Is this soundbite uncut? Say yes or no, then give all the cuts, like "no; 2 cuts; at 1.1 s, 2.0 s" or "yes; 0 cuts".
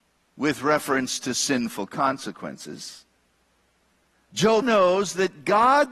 no; 1 cut; at 4.6 s